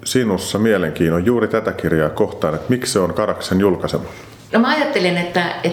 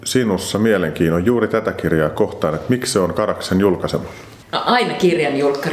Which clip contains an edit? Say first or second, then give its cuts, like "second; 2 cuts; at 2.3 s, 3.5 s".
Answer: second; 1 cut; at 4.4 s